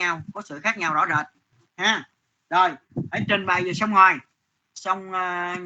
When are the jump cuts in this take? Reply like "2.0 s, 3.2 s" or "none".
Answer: none